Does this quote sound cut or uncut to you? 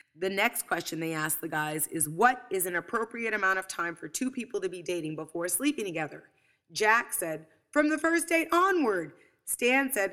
uncut